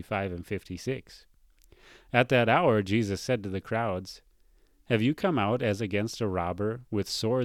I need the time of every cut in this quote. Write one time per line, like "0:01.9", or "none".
none